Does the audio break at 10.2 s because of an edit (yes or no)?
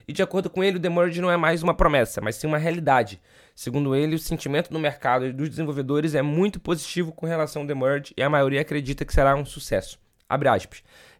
no